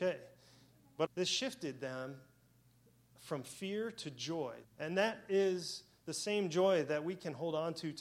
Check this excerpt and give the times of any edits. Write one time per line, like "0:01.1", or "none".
0:01.0
0:04.6